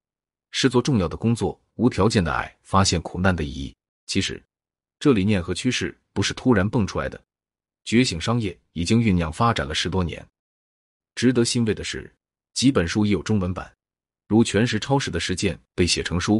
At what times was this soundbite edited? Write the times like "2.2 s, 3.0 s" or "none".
4.1 s